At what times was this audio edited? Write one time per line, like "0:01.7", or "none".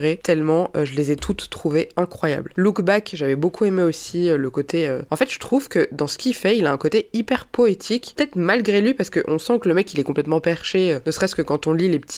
0:02.5